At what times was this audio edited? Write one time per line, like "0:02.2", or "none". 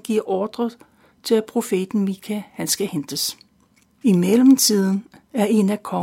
0:04.0